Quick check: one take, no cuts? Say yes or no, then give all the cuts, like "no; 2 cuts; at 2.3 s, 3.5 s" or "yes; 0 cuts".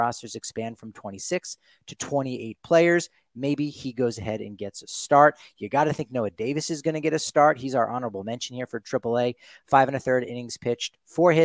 yes; 0 cuts